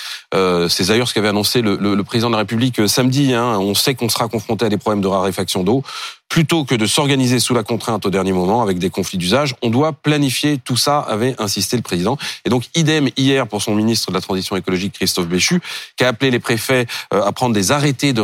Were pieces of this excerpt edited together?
no; 0 cuts

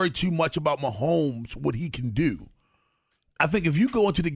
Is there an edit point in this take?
no; 0 cuts

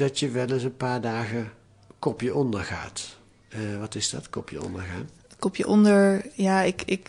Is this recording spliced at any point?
no; 0 cuts

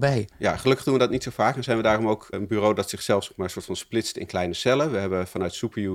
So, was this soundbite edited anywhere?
yes; 1 cut; at 2.3 s

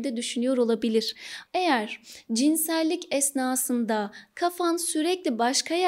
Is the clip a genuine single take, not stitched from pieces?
no; 1 cut; at 1.5 s

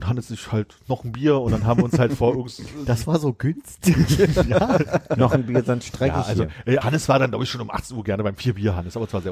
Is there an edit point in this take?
yes; 1 cut; at 6.8 s

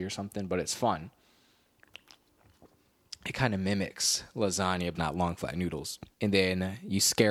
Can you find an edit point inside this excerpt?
yes; 2 cuts; at 5.0 s, 6.1 s

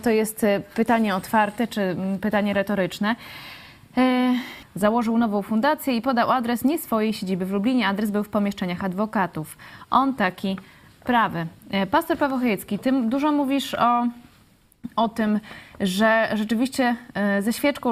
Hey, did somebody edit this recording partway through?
yes; 1 cut; at 4.6 s

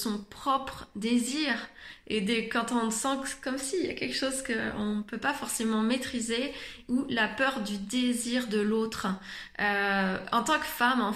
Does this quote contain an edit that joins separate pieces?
no; 0 cuts

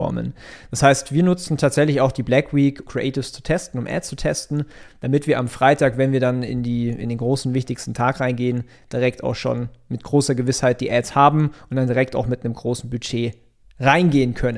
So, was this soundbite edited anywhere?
yes; 1 cut; at 2.9 s

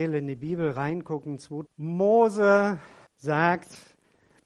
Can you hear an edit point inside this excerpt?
yes; 2 cuts; at 1.7 s, 3.1 s

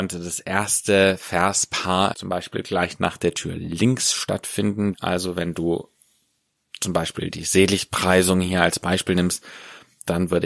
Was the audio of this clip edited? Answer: yes; 2 cuts; at 2.1 s, 4.9 s

